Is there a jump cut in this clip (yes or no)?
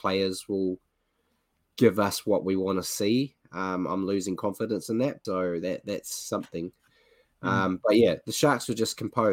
yes